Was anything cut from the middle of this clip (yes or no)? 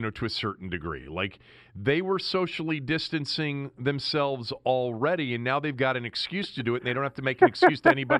no